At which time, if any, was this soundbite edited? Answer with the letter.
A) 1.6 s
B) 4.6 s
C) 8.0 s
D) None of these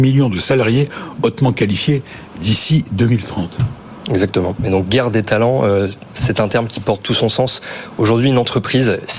B